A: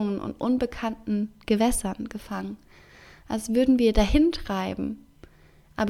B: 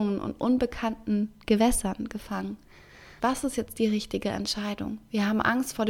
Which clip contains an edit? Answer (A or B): B